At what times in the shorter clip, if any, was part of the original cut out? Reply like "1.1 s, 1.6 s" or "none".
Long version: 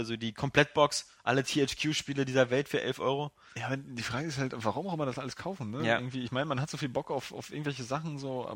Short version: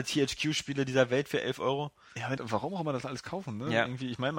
2.4 s

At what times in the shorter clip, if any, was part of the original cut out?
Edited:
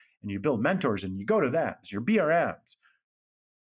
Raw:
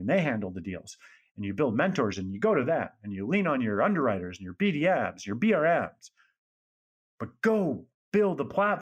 1.8 s

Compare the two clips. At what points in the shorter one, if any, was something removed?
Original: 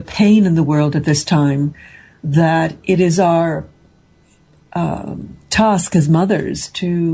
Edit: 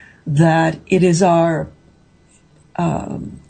none

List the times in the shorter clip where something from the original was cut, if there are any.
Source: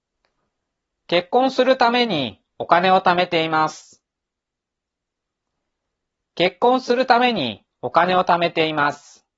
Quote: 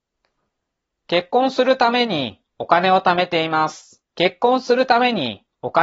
4.1 s

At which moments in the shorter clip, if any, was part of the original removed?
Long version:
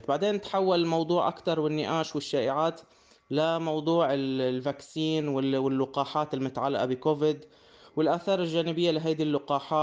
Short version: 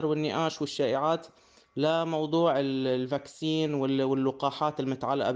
none

